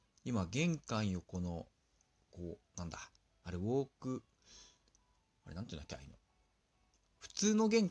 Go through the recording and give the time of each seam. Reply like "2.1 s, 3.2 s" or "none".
none